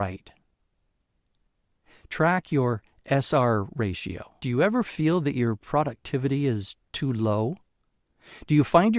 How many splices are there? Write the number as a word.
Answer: one